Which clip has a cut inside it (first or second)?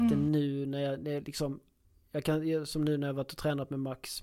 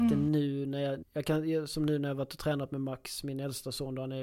second